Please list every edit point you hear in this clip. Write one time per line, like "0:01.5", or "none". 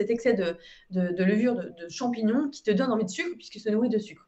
none